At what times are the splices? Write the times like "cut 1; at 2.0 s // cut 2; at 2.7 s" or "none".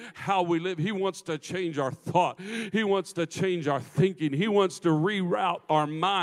none